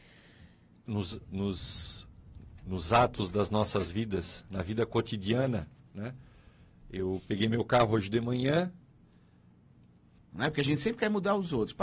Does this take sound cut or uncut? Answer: cut